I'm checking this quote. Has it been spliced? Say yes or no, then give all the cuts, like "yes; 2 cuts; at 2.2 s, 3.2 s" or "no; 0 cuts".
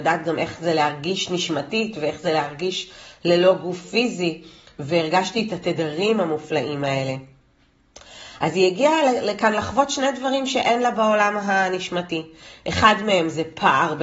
no; 0 cuts